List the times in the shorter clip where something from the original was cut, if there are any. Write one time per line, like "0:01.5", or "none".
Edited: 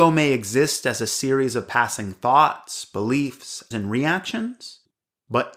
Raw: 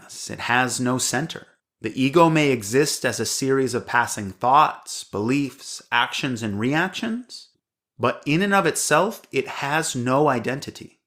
0:03.7